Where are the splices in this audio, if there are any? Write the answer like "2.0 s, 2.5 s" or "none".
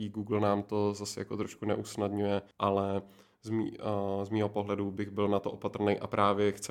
2.5 s